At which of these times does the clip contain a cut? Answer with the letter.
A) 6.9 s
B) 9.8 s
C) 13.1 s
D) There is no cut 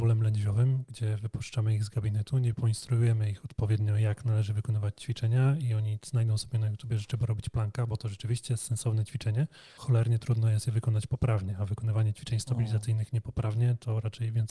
B